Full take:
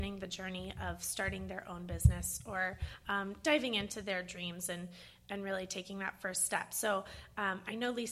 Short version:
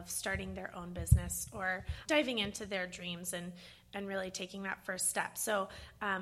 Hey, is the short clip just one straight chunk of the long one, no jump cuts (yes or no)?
no